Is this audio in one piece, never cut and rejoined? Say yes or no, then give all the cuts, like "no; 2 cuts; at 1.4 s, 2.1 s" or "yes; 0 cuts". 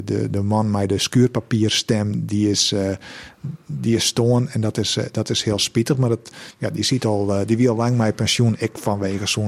yes; 0 cuts